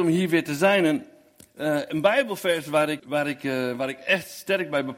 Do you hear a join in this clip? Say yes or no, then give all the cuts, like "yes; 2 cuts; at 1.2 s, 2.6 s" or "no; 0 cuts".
yes; 1 cut; at 3.0 s